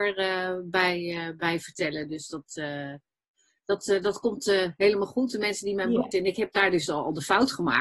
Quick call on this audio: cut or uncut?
cut